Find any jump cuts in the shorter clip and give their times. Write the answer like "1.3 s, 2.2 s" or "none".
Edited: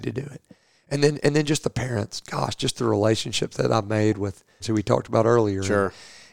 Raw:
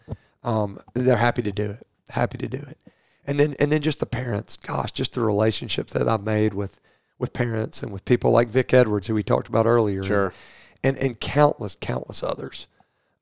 4.6 s